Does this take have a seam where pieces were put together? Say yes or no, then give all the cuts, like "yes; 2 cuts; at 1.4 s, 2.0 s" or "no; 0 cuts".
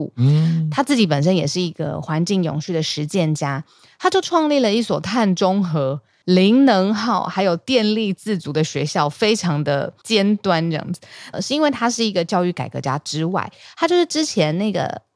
yes; 1 cut; at 11.3 s